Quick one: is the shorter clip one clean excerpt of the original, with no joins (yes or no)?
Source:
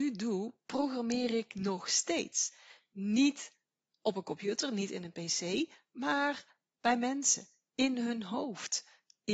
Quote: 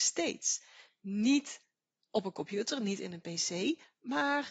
yes